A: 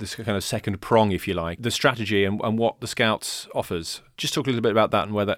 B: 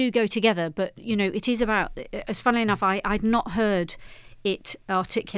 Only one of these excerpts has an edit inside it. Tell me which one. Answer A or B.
A